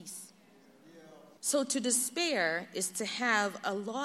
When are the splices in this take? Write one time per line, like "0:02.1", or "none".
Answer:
0:01.4